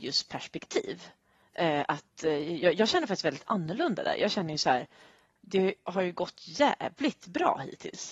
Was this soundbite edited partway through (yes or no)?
no